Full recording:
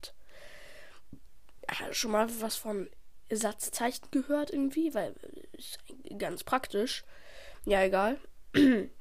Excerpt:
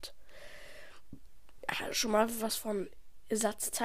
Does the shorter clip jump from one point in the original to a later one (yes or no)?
no